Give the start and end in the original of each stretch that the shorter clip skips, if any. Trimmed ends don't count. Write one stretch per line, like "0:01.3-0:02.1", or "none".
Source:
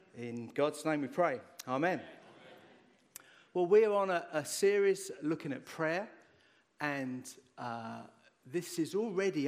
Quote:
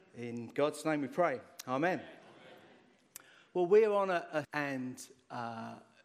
0:04.4-0:06.7